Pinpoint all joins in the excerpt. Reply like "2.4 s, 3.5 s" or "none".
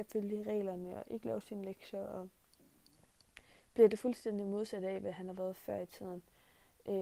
none